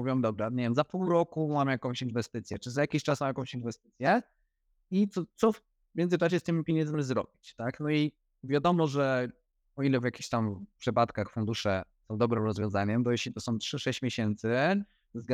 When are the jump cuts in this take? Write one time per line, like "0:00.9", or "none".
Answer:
none